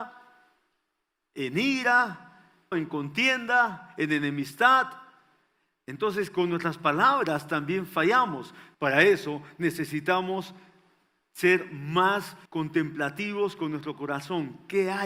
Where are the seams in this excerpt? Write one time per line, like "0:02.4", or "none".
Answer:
0:02.7
0:08.7
0:12.5

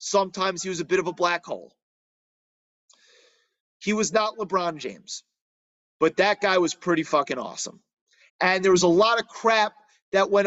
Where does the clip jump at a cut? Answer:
0:03.6
0:08.3

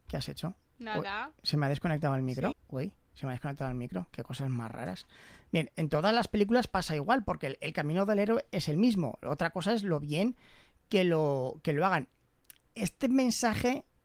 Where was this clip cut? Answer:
0:02.5

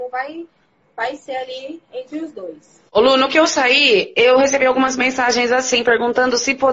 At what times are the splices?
0:02.9

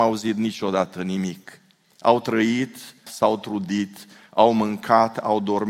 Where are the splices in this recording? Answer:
0:01.8
0:03.1

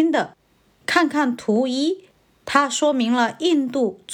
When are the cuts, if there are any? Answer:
none

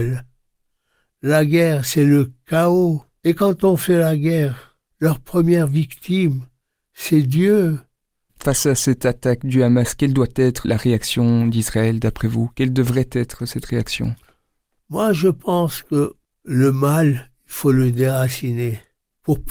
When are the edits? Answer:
0:03.2
0:08.3
0:10.6

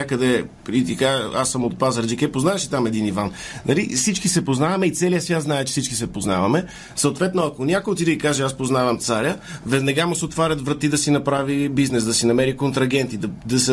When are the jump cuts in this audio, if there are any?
none

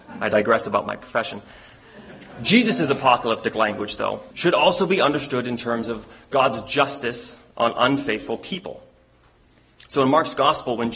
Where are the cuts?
0:04.3

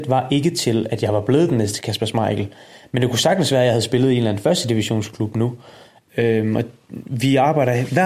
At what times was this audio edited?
0:06.1

